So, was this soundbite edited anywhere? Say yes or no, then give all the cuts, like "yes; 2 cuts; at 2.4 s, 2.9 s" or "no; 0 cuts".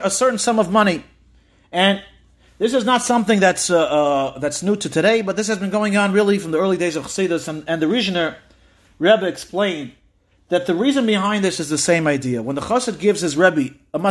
no; 0 cuts